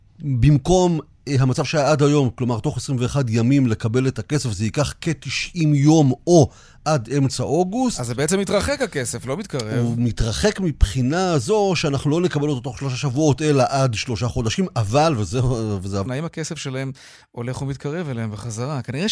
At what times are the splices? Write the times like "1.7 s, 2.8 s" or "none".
16.1 s